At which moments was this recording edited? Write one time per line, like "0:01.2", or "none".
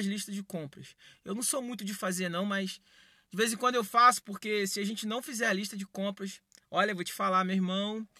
none